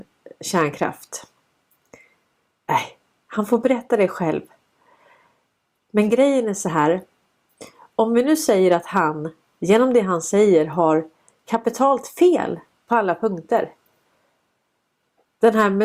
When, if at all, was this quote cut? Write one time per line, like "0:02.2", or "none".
none